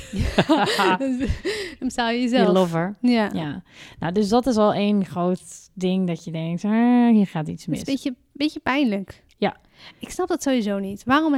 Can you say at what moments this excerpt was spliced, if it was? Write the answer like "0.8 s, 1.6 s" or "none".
none